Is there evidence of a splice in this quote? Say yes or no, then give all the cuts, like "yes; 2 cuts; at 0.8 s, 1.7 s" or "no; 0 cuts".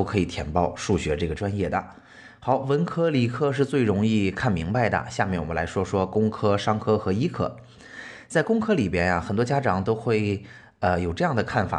no; 0 cuts